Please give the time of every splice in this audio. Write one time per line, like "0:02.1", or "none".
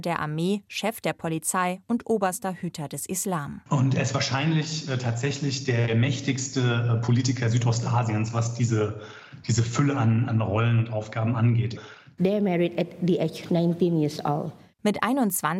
0:12.2